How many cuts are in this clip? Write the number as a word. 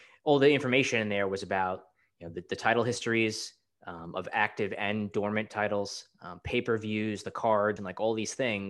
one